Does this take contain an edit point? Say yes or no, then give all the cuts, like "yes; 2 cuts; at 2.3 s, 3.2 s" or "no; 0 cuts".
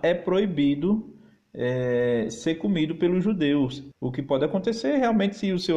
yes; 1 cut; at 3.9 s